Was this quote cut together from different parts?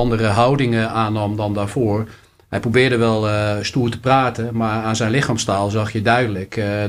no; 0 cuts

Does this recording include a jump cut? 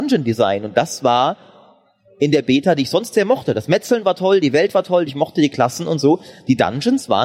yes; 1 cut; at 5.1 s

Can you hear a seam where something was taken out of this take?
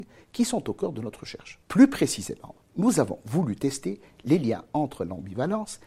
yes; 1 cut; at 1.6 s

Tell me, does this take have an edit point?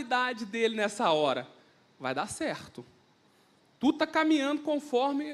no; 0 cuts

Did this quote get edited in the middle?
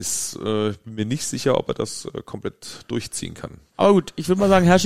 no; 0 cuts

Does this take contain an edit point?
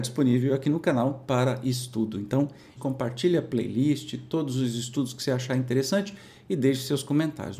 yes; 1 cut; at 2.8 s

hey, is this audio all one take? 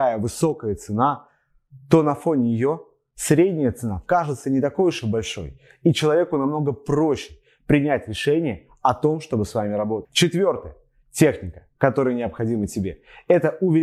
yes; 0 cuts

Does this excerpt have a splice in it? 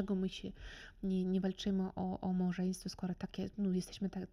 no; 0 cuts

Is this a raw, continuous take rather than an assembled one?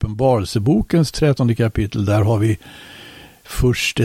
yes; 0 cuts

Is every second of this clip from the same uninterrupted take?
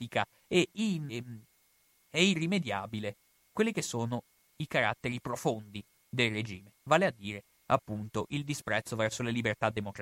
no; 1 cut; at 1.1 s

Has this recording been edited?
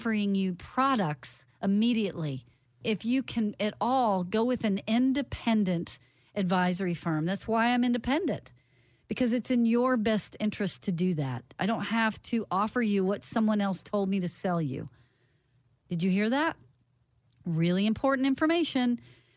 no; 0 cuts

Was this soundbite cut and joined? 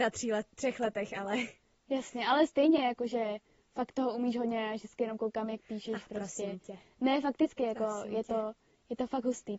no; 0 cuts

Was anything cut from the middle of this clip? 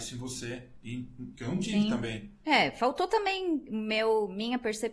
yes; 1 cut; at 1.3 s

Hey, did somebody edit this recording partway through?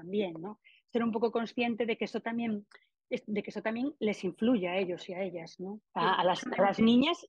yes; 1 cut; at 5.9 s

